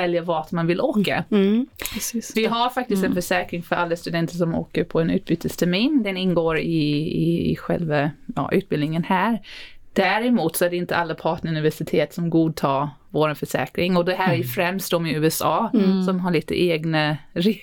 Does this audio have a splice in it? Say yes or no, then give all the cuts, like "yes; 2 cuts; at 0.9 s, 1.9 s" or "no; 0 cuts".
yes; 1 cut; at 2.3 s